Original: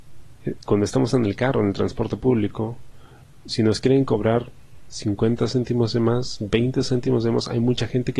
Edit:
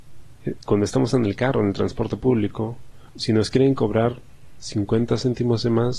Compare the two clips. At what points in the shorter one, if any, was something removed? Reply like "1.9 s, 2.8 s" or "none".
3.1 s